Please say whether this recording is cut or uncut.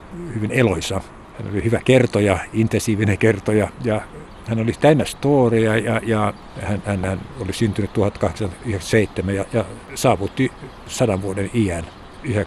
uncut